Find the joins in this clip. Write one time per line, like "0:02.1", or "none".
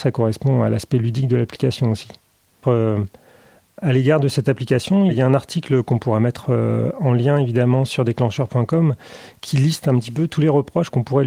0:02.6